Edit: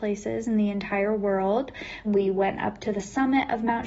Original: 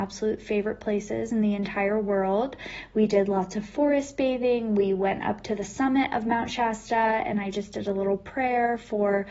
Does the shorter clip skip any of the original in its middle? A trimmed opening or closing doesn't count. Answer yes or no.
yes